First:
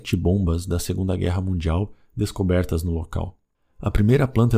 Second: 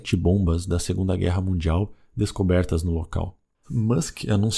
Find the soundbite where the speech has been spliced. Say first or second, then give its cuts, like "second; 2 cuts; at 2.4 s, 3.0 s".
second; 1 cut; at 3.6 s